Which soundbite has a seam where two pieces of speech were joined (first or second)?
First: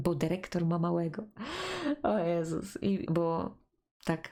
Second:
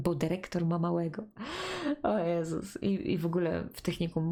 first